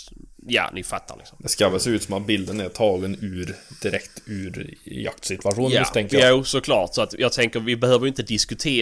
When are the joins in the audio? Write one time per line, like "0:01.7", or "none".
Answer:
none